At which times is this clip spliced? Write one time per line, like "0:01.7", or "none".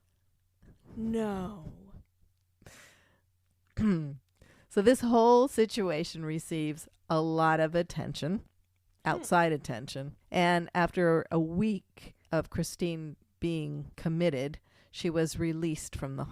0:10.2
0:12.2
0:13.9